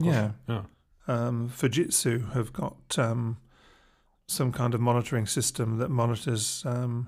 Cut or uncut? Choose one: cut